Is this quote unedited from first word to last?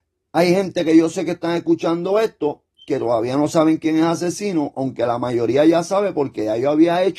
yes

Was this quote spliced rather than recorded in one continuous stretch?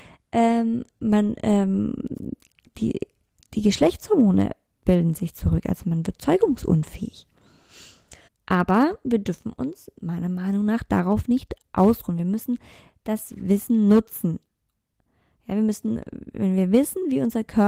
yes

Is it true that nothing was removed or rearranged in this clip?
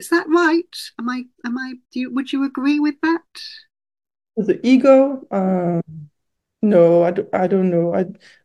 no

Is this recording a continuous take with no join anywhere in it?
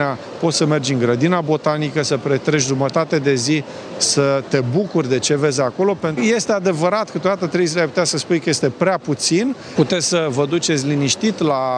no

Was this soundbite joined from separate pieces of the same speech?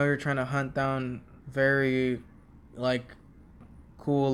yes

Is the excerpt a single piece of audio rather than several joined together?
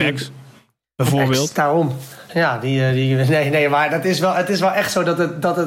yes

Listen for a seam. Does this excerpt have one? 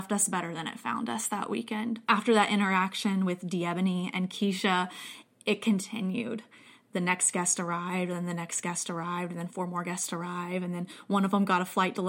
no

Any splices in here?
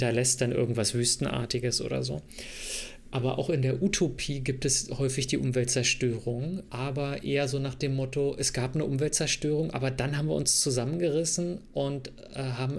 no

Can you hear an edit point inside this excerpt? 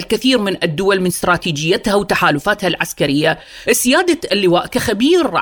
no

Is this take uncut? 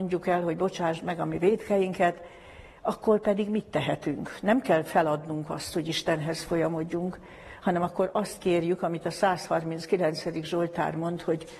yes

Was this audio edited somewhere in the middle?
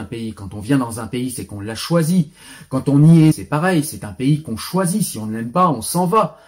yes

